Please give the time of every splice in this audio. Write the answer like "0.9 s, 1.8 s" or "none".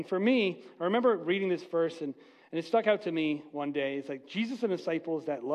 none